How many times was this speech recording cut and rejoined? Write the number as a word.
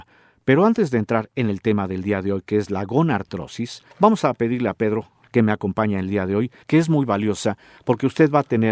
three